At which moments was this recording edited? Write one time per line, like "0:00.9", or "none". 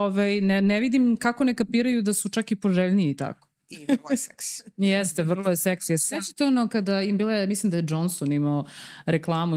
0:03.6